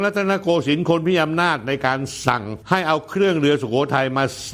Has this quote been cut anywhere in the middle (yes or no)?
yes